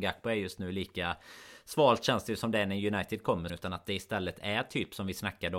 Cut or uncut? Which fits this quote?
cut